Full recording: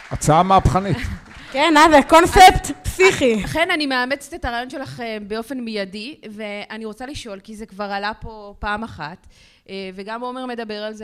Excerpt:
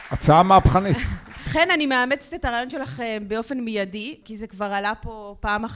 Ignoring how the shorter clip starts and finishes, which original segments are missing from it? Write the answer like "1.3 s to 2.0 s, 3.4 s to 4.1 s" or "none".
1.5 s to 3.5 s, 6.2 s to 7.4 s